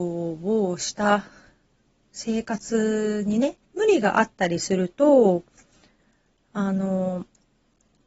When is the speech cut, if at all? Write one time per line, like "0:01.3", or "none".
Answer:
0:03.6